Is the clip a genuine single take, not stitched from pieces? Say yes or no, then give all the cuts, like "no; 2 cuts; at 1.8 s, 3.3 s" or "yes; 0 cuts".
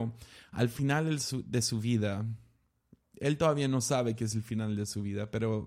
yes; 0 cuts